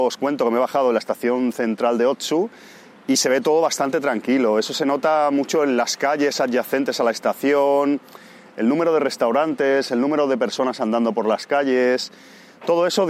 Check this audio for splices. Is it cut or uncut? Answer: uncut